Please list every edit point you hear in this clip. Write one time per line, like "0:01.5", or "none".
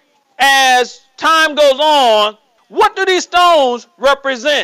0:02.6